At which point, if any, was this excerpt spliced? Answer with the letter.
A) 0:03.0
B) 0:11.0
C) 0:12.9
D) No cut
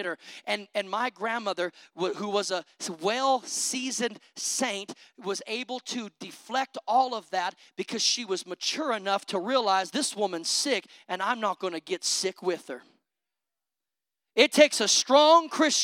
D